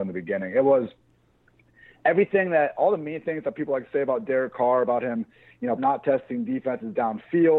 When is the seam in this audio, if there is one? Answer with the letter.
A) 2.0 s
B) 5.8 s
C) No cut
B